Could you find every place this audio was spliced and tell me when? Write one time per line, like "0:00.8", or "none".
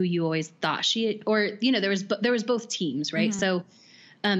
none